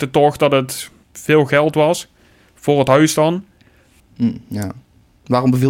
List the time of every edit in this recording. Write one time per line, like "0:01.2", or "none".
0:04.0